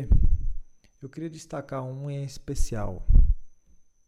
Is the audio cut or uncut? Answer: uncut